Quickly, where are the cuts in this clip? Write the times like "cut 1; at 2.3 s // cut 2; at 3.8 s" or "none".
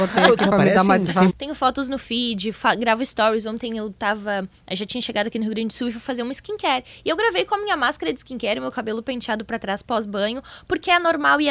cut 1; at 1.3 s

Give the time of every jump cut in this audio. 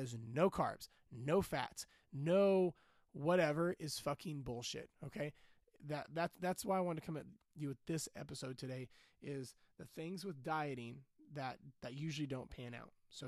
cut 1; at 4.9 s // cut 2; at 11.7 s

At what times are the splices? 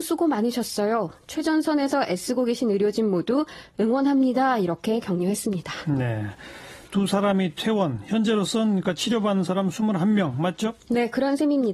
none

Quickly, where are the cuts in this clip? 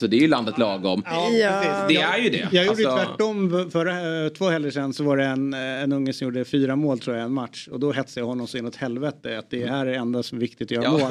none

